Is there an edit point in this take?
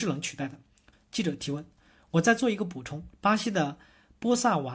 yes; 2 cuts; at 0.9 s, 3.1 s

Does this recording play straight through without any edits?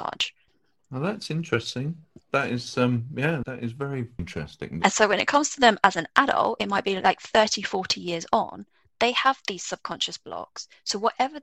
no; 1 cut; at 4.8 s

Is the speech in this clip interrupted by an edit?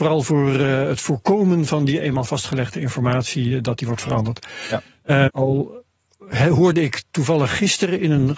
yes; 1 cut; at 5.3 s

